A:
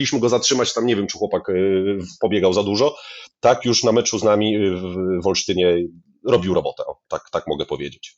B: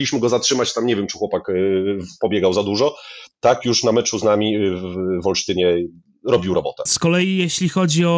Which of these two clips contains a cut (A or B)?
B